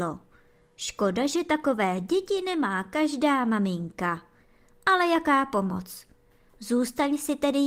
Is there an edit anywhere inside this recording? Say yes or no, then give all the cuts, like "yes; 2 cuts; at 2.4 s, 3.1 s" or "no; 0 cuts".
no; 0 cuts